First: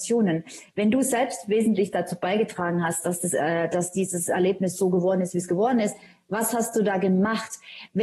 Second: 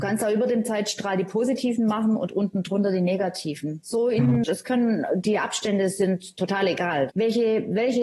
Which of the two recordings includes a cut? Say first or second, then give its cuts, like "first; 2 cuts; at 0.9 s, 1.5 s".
second; 2 cuts; at 4.4 s, 7.1 s